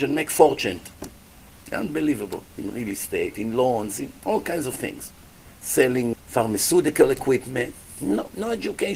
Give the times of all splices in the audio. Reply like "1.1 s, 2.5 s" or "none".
6.1 s